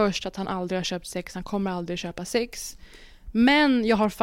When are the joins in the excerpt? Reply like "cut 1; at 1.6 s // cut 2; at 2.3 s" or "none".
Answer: none

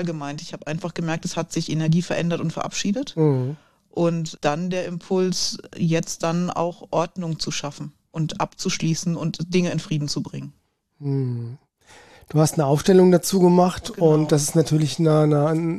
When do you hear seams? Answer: cut 1; at 4.4 s

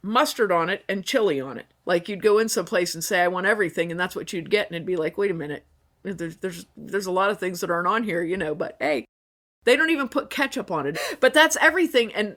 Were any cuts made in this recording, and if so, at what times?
cut 1; at 1.8 s // cut 2; at 10.9 s

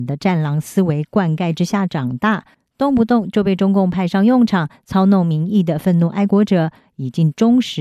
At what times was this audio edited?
none

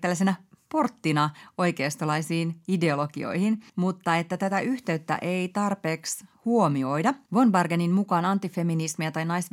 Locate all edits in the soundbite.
cut 1; at 3.7 s // cut 2; at 7.3 s

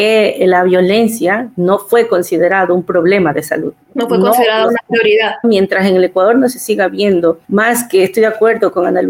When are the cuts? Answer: cut 1; at 3.8 s // cut 2; at 5.4 s // cut 3; at 7.4 s

